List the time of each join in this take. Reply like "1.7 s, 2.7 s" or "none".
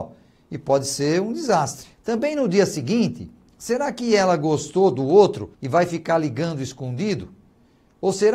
1.9 s, 5.5 s